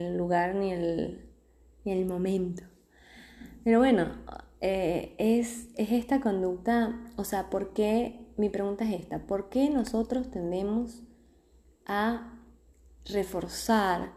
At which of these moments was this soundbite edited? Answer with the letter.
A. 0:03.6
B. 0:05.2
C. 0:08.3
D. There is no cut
D